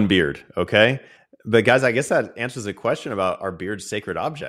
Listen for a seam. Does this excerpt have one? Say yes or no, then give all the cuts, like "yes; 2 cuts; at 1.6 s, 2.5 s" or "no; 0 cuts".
no; 0 cuts